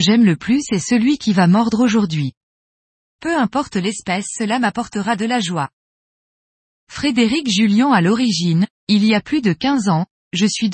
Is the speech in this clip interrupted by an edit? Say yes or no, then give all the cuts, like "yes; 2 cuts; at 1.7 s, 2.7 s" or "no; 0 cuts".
no; 0 cuts